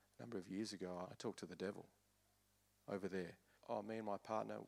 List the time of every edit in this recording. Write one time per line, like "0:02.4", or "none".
0:01.0
0:03.5